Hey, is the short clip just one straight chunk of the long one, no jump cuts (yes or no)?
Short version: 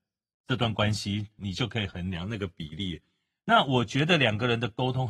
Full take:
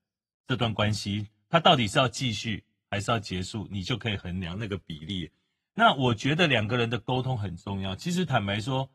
no